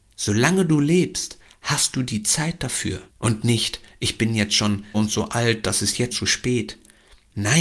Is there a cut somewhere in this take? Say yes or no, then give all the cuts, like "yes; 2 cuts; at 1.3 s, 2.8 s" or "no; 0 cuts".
yes; 3 cuts; at 3.1 s, 4.9 s, 6.1 s